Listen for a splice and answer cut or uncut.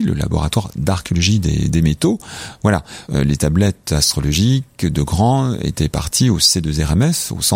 cut